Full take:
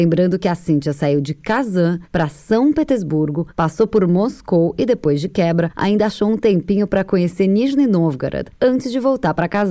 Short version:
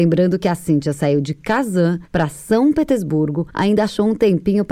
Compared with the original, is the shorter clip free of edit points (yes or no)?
no